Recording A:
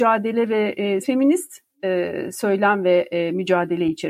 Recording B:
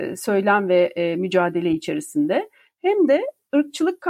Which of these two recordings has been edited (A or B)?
A